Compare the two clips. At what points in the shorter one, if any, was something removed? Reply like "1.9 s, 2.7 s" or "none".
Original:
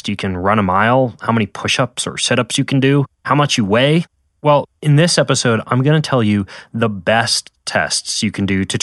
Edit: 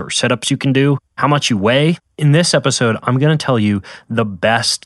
2.1 s